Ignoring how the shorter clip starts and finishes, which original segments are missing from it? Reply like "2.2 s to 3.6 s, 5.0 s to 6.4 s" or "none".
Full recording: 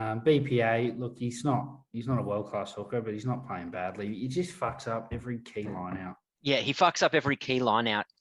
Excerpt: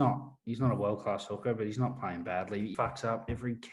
4.2 s to 4.6 s